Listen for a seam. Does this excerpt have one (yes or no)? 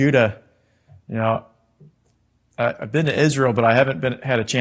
no